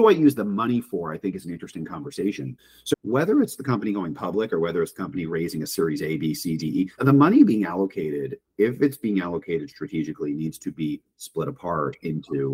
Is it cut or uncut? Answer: cut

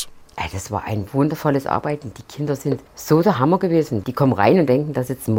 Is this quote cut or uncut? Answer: cut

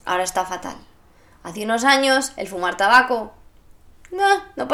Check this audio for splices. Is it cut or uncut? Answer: uncut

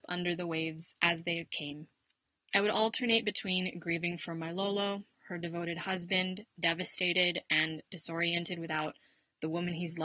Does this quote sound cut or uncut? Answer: cut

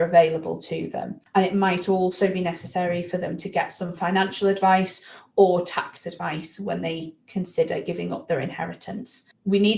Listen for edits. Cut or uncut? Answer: cut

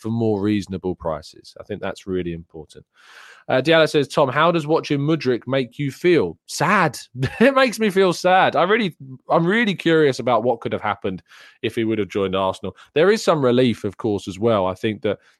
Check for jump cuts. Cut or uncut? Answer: uncut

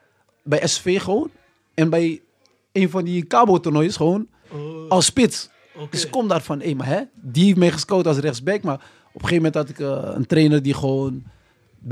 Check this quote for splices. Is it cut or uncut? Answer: uncut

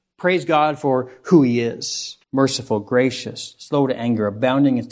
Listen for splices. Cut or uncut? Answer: cut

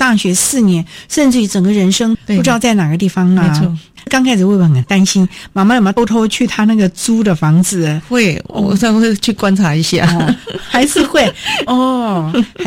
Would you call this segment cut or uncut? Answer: cut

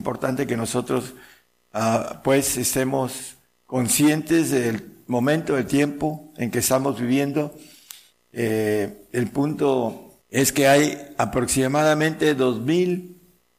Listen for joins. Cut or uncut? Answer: cut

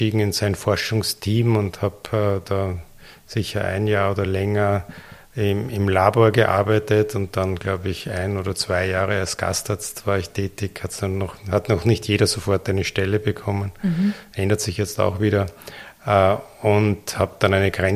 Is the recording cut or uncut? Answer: uncut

